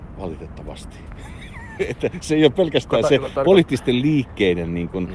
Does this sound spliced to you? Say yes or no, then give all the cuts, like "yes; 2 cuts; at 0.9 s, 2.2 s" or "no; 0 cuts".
no; 0 cuts